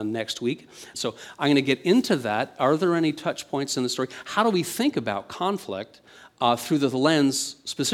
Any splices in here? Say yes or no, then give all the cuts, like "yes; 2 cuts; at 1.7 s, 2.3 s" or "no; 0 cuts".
yes; 1 cut; at 0.9 s